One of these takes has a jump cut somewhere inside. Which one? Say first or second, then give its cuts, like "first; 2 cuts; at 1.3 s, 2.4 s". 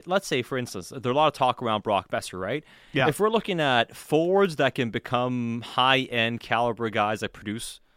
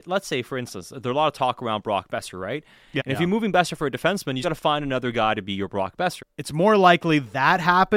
second; 3 cuts; at 3.0 s, 4.4 s, 6.2 s